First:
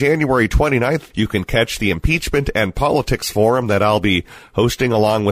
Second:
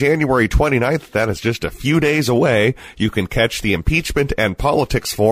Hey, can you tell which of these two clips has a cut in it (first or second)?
first